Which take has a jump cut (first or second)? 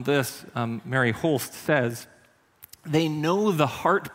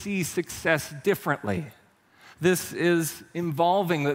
second